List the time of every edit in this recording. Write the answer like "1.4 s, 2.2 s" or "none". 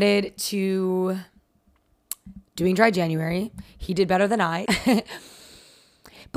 4.7 s

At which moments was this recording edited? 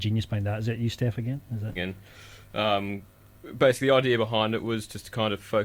1.8 s

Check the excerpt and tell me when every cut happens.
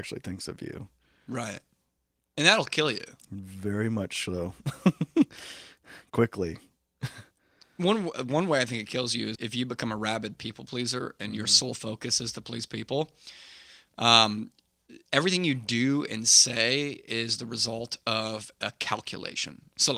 9.3 s

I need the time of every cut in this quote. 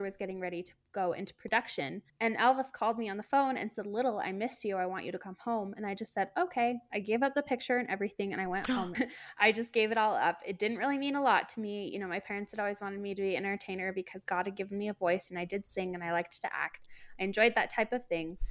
8.9 s

